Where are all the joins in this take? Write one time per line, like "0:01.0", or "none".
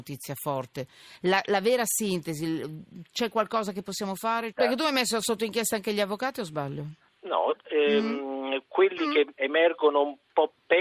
0:04.5
0:07.6